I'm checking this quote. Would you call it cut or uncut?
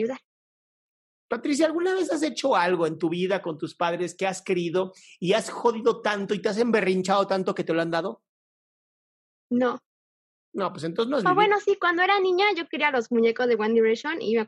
uncut